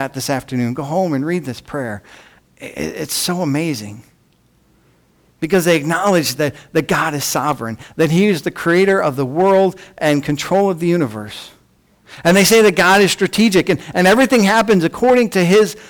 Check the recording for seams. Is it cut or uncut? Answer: uncut